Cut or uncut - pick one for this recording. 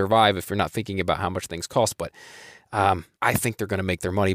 cut